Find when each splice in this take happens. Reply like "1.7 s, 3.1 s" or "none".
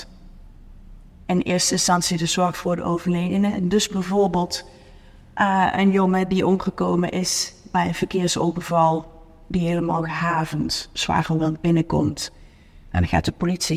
none